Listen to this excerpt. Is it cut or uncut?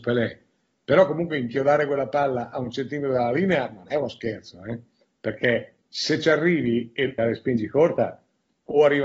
cut